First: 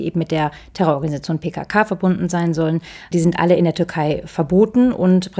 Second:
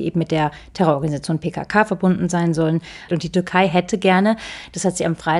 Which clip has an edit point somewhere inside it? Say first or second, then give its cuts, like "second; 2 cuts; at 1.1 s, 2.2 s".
second; 1 cut; at 3.1 s